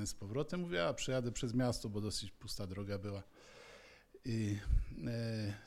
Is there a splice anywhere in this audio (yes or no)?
no